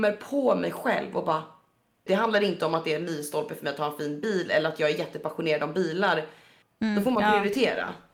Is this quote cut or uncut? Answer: cut